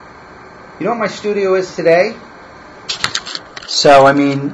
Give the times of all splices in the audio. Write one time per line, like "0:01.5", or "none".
0:03.6